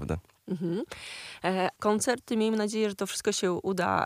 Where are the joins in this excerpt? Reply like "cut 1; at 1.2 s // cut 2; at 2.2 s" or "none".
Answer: cut 1; at 1.8 s

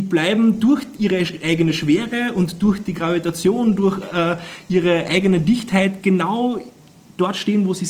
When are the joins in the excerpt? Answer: none

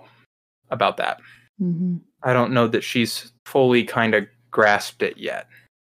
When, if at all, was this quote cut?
cut 1; at 1.5 s // cut 2; at 3.4 s

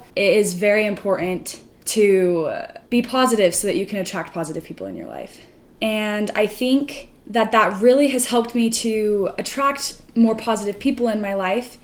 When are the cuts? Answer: cut 1; at 5.8 s

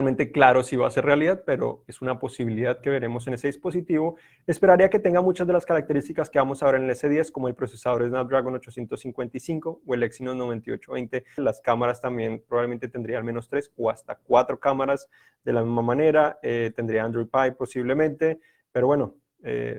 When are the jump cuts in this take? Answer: cut 1; at 11.4 s

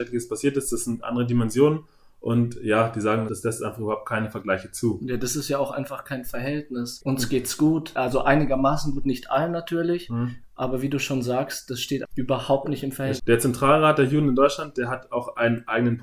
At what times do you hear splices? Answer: cut 1; at 10.4 s // cut 2; at 12.1 s // cut 3; at 13.2 s

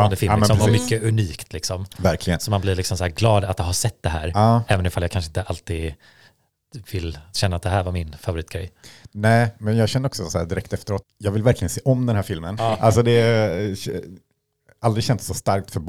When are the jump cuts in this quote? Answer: cut 1; at 11.0 s // cut 2; at 12.6 s

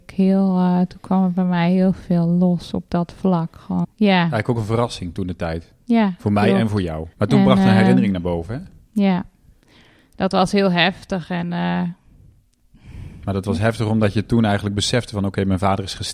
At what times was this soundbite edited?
cut 1; at 3.8 s // cut 2; at 7.1 s

